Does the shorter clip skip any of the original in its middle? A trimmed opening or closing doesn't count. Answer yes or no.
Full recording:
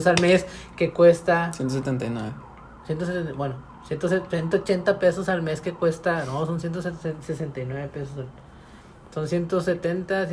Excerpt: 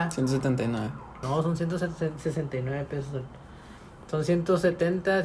yes